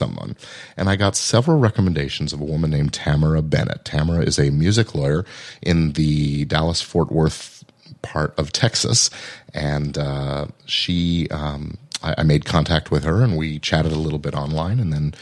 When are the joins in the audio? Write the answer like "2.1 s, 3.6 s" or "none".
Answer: none